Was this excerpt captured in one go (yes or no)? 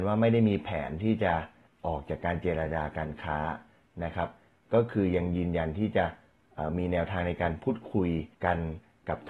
no